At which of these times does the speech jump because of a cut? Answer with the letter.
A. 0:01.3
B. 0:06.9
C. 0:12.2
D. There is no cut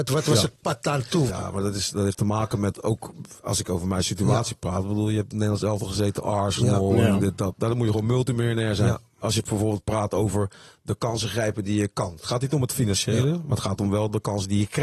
A